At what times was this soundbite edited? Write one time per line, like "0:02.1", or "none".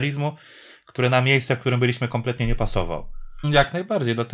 0:03.4